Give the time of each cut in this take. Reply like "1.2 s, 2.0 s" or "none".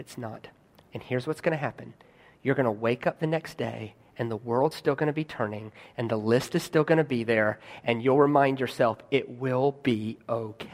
none